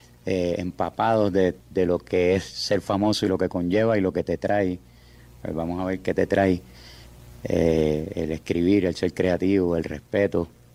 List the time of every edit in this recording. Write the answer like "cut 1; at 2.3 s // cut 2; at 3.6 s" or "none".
cut 1; at 1.6 s